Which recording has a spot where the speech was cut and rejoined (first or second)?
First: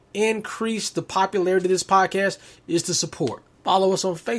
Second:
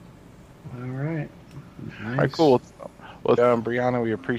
second